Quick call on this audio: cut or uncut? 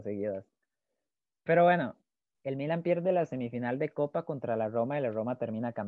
cut